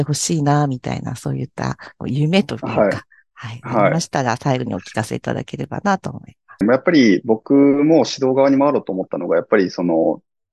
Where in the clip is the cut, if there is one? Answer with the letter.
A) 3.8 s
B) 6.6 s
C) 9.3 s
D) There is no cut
B